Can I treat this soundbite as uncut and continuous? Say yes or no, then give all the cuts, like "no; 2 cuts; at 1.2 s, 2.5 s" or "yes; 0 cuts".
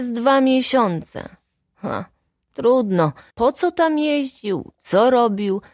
no; 1 cut; at 3.3 s